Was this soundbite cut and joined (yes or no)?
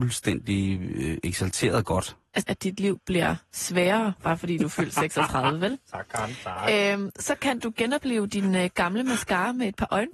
yes